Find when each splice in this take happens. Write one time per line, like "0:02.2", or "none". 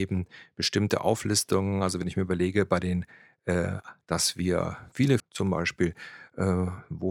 0:04.0
0:05.2